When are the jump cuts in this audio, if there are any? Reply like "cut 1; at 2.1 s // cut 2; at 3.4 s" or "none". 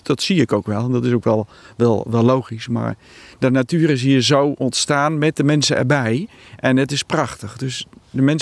none